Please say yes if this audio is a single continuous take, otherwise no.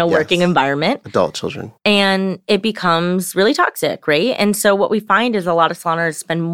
yes